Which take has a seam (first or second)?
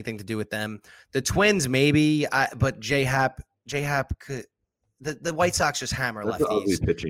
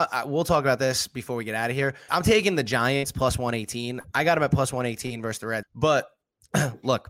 second